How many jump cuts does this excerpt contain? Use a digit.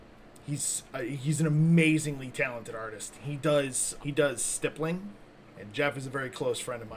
2